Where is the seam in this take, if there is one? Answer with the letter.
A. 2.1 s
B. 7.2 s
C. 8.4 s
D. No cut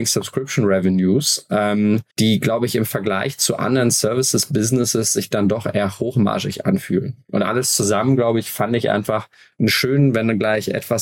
A